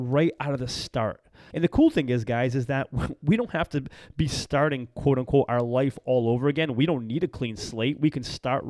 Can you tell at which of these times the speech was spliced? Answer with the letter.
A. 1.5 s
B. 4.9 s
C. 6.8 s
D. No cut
A